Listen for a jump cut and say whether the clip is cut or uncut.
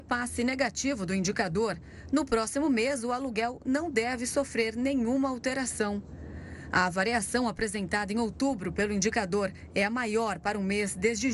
uncut